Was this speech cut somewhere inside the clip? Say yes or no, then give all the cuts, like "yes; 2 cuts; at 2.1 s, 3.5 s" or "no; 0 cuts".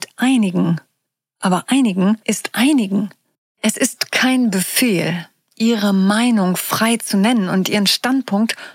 yes; 1 cut; at 5.5 s